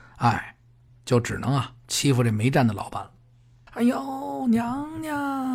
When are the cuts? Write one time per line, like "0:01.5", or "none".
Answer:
0:03.7